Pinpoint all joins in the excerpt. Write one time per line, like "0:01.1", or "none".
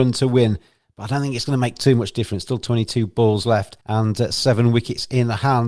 0:03.8